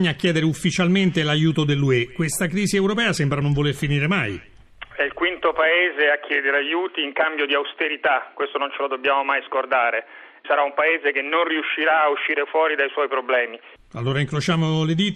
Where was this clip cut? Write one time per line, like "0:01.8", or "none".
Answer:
0:03.4
0:10.4
0:13.8